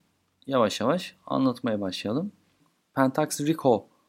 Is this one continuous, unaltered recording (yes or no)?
yes